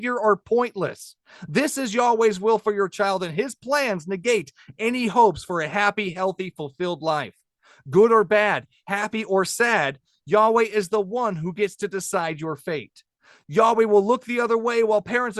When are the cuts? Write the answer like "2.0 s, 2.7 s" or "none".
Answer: none